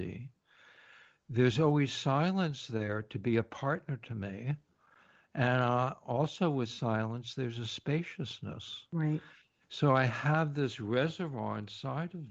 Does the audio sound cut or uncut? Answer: uncut